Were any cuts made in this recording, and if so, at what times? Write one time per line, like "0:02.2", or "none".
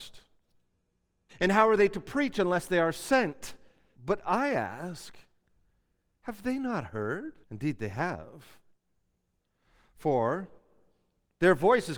0:01.3
0:03.9
0:07.4